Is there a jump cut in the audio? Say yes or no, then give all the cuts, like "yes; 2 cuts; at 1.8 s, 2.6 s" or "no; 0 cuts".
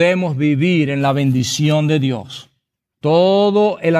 yes; 1 cut; at 2.9 s